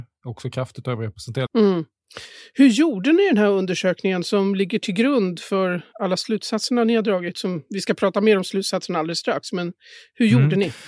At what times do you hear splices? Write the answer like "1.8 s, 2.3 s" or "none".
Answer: 1.5 s

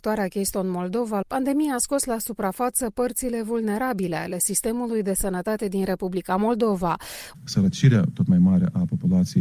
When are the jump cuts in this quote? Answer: 1.2 s, 7.3 s

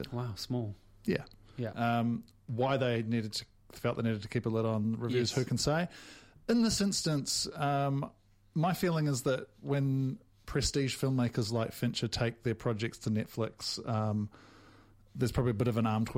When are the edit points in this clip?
1.7 s

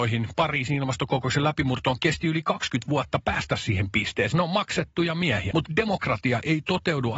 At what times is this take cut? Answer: 4.3 s, 5.5 s

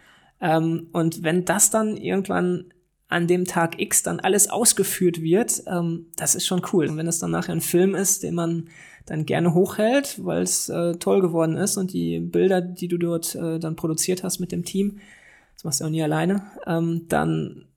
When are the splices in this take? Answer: 6.9 s

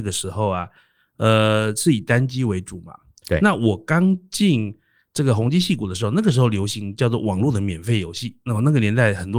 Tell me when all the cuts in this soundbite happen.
none

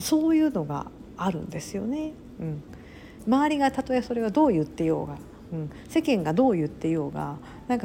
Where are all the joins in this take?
2.4 s

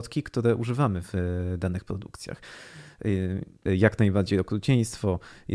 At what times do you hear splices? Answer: 3.7 s

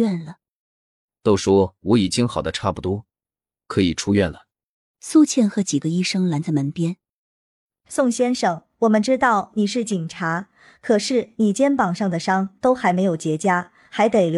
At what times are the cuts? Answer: 4.9 s

